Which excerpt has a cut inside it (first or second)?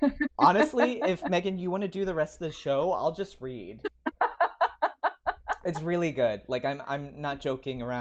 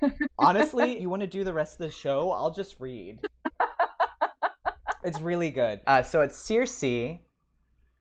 second